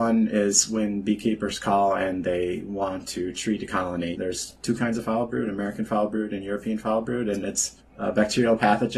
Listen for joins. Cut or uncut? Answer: cut